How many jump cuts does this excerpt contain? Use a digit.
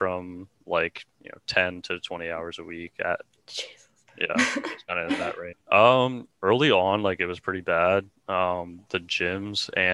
2